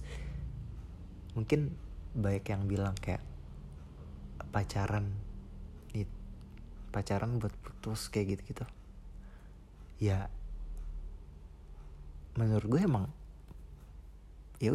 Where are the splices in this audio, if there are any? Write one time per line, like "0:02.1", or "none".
none